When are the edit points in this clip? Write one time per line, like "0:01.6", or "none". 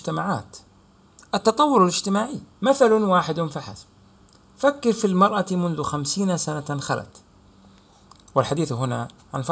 0:02.5